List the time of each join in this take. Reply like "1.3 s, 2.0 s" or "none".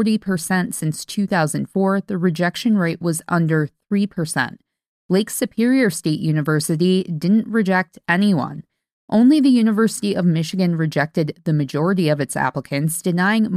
none